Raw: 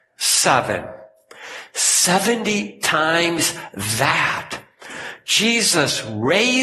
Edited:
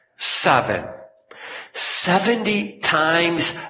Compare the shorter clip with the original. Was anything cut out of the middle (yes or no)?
no